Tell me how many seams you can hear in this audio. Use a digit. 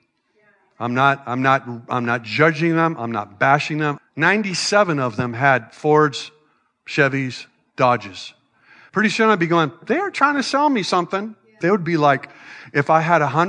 3